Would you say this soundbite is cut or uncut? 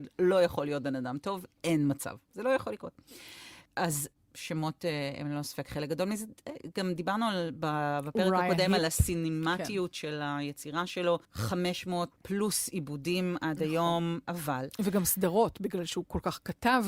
cut